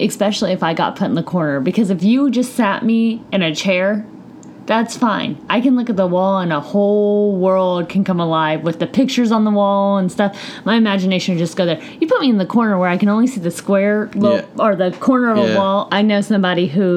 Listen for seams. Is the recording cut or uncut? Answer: cut